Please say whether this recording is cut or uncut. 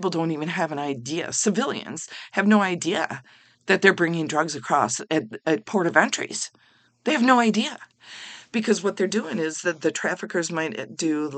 uncut